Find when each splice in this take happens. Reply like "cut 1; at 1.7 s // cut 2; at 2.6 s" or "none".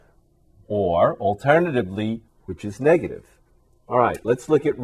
cut 1; at 2.3 s